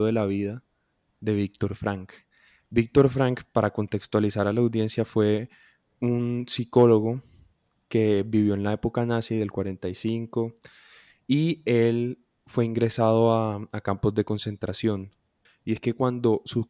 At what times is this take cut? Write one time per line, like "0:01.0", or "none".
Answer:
0:15.5